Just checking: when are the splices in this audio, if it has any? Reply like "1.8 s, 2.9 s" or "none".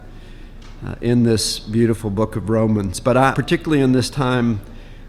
3.3 s